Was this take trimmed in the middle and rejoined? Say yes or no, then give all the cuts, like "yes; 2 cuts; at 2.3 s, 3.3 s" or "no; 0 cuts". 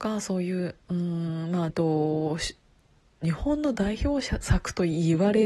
yes; 1 cut; at 1.7 s